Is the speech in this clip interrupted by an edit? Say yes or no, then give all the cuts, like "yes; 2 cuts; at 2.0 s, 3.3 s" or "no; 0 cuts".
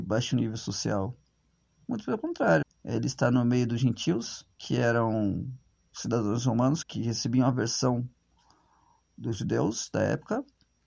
yes; 3 cuts; at 2.6 s, 4.5 s, 6.8 s